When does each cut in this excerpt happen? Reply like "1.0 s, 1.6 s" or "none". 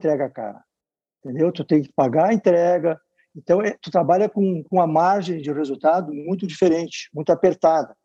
none